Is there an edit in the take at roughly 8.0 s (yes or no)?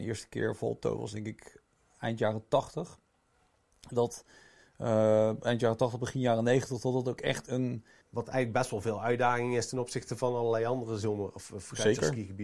yes